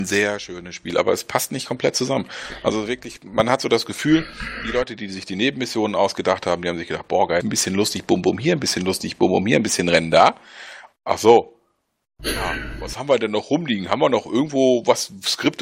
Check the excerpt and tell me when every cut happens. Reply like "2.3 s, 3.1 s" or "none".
7.4 s, 10.9 s